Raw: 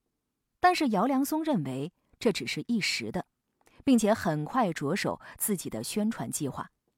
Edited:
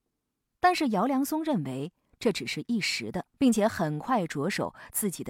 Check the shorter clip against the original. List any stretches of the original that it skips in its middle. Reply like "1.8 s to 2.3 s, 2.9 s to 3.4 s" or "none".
3.3 s to 3.8 s